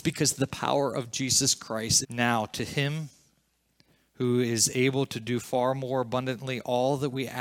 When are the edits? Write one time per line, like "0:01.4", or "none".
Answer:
0:02.0